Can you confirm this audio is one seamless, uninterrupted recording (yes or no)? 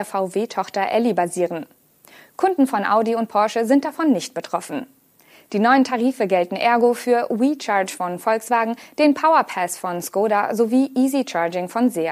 yes